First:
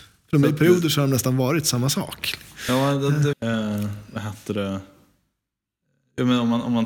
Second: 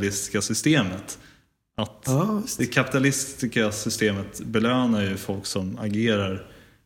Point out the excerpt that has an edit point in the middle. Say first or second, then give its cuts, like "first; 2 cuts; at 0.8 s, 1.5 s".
first; 1 cut; at 3.3 s